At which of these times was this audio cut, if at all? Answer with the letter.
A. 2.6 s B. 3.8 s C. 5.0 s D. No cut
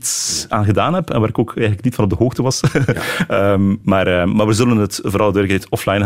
D